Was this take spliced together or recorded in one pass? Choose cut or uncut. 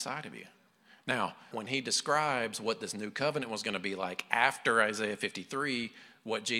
cut